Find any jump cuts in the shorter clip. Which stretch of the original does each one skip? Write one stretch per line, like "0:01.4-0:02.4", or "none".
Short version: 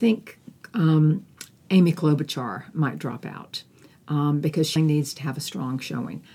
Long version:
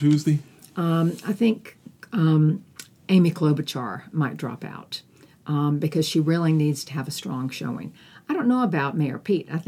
0:06.1-0:06.5